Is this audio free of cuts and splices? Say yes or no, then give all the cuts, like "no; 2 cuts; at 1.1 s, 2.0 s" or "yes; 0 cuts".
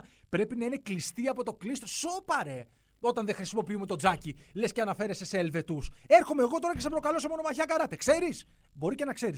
yes; 0 cuts